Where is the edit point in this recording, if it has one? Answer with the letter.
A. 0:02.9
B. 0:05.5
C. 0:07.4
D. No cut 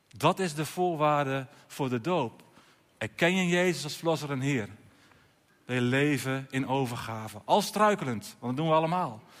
B